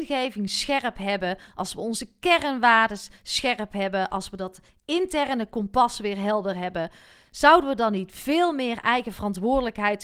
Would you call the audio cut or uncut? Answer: uncut